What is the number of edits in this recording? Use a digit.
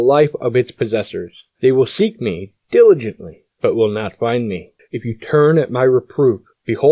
2